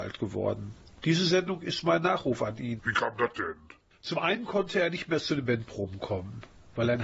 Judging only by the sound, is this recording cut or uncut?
cut